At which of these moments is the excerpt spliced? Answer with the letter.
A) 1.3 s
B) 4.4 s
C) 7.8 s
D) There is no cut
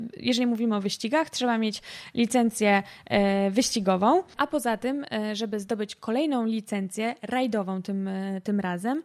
B